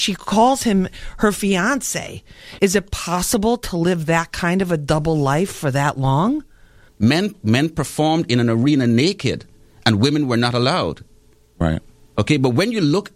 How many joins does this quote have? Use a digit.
2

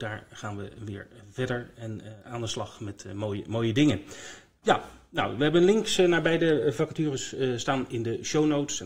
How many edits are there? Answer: 2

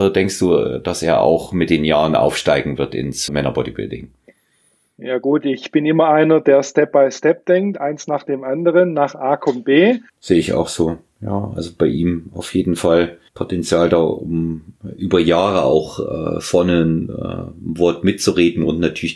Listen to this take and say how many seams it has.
3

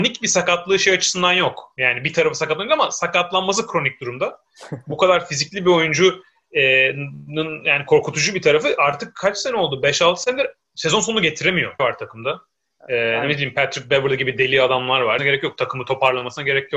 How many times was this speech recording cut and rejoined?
2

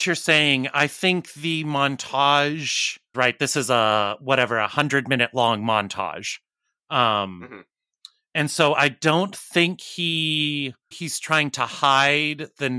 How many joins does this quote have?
2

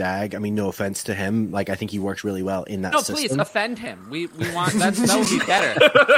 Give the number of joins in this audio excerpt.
0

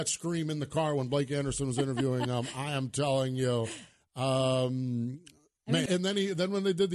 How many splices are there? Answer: 1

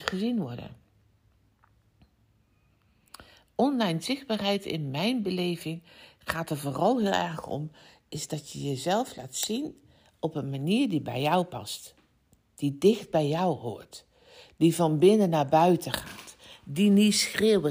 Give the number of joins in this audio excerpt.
1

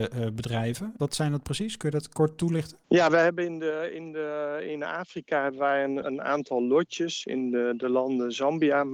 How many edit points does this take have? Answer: 1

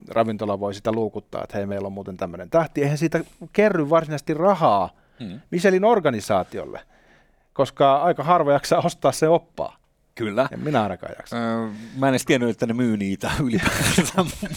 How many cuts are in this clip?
0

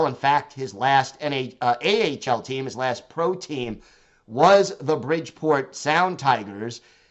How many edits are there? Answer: 0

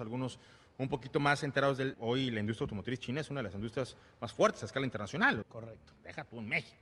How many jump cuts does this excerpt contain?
2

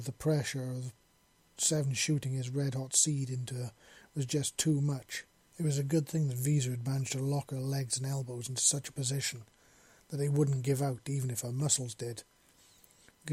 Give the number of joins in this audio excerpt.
1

